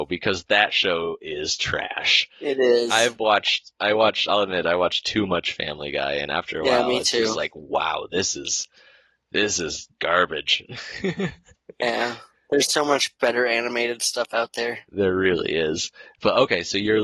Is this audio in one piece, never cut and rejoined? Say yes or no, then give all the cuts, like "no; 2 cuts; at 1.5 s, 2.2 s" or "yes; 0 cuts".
yes; 0 cuts